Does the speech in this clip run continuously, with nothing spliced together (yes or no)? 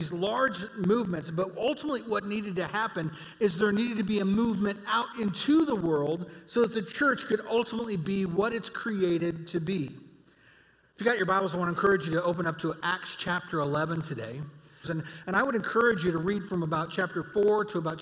no